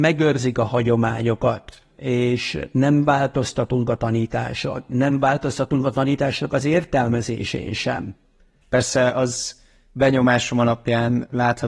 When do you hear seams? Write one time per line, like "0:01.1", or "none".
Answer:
0:08.6